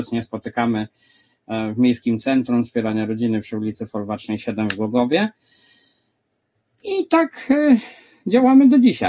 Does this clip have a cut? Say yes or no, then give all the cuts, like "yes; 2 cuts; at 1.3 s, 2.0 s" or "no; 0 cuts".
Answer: no; 0 cuts